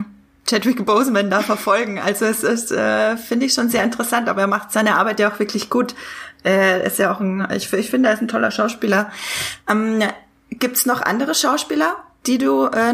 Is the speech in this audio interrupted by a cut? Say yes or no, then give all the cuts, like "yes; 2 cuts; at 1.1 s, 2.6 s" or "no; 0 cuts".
no; 0 cuts